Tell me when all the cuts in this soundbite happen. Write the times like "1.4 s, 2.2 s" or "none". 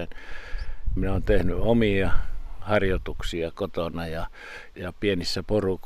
1.0 s, 4.7 s